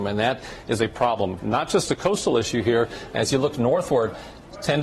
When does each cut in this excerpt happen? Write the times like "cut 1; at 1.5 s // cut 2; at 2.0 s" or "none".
cut 1; at 1.4 s